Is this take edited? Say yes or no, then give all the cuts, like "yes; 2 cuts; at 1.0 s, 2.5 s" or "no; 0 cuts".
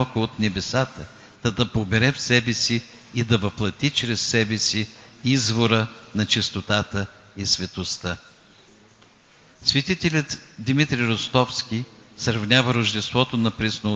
no; 0 cuts